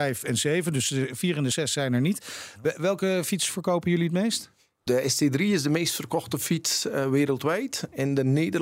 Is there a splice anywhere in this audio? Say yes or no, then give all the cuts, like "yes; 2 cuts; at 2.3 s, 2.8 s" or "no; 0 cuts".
no; 0 cuts